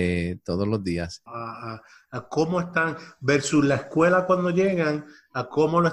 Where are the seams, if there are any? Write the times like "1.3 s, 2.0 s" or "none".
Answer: 1.3 s